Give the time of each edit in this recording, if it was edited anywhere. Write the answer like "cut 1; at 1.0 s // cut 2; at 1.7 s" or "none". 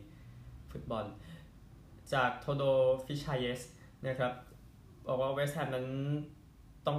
none